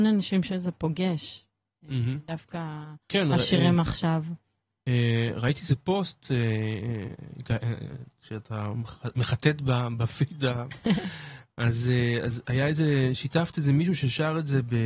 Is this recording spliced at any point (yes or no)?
yes